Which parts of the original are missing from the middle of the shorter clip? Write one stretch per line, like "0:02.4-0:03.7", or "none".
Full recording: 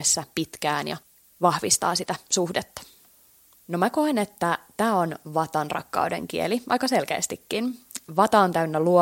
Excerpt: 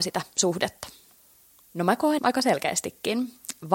0:04.1-0:06.6

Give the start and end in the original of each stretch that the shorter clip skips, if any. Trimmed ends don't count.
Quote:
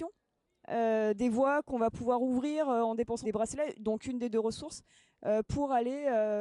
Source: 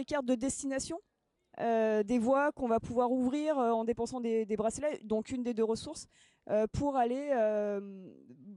0:04.1-0:04.5

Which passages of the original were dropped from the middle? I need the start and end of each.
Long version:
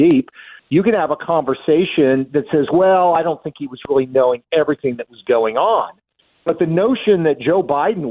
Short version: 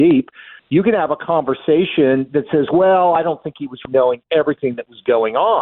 0:03.9-0:04.1

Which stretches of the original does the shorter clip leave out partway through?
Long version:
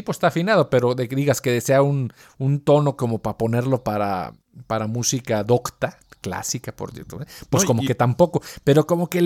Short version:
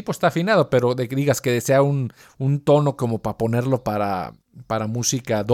none

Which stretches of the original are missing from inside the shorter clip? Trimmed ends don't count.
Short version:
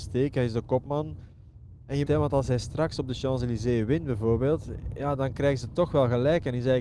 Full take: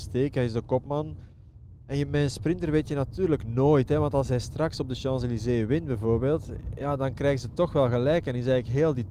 0:02.1-0:03.9

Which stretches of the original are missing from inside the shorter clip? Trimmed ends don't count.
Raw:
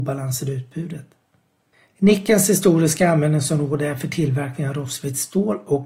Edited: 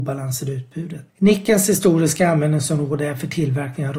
0:01.1-0:01.9

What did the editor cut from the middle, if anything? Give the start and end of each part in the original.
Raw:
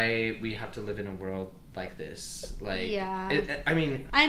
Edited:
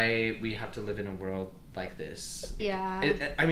0:02.6-0:02.9

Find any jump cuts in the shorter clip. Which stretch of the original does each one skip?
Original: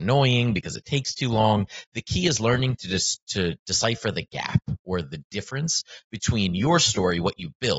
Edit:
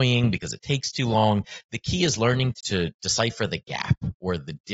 0:02.8-0:03.2

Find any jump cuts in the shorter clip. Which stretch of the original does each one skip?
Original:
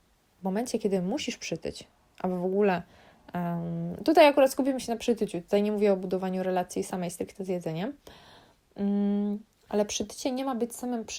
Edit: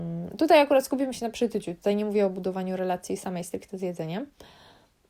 none

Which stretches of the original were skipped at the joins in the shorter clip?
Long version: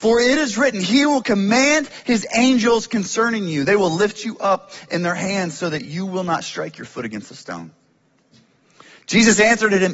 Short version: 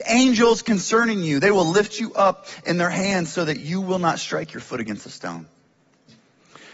none

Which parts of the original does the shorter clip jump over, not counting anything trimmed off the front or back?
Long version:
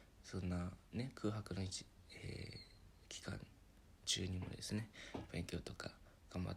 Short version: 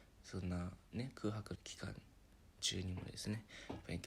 0:01.6-0:03.0

